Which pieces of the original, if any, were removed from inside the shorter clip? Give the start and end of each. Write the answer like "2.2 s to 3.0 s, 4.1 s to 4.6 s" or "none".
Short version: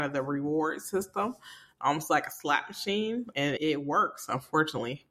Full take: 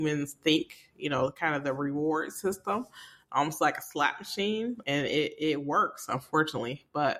5.1 s to 5.4 s